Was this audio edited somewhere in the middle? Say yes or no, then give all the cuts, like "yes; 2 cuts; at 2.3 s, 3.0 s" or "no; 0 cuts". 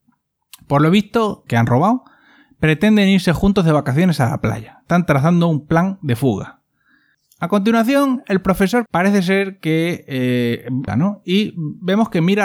yes; 3 cuts; at 1.5 s, 8.9 s, 10.9 s